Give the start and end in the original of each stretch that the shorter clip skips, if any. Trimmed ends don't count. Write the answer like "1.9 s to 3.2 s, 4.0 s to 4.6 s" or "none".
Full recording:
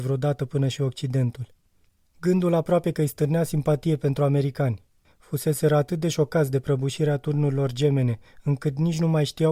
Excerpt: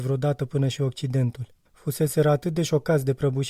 1.6 s to 5.1 s